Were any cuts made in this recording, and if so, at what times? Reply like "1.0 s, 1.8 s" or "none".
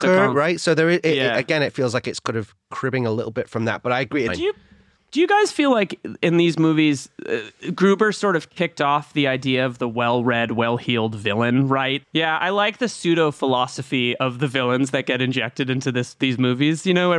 4.3 s, 12.0 s